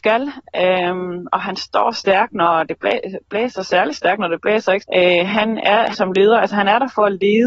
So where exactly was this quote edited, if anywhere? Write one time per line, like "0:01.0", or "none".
0:04.8
0:05.9